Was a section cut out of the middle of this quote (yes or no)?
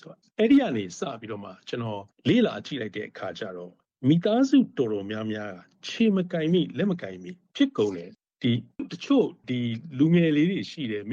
no